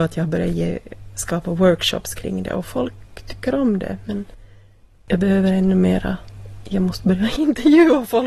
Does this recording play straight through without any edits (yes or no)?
yes